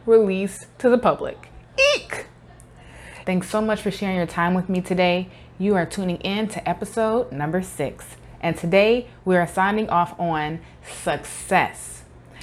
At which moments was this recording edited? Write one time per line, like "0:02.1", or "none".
0:03.2